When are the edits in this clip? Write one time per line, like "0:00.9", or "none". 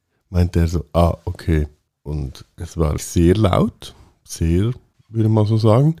0:03.0
0:04.9